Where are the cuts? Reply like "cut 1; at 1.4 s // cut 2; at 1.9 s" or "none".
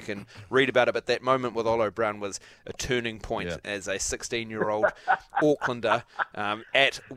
none